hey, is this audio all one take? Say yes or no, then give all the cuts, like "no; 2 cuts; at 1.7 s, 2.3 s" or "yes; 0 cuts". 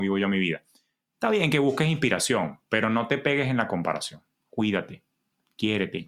no; 1 cut; at 4.3 s